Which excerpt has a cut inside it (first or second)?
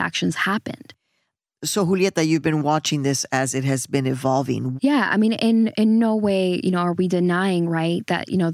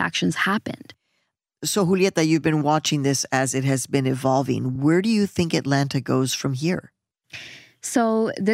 first